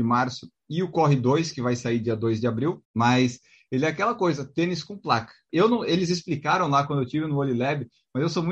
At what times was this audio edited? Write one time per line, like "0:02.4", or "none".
0:02.8
0:05.5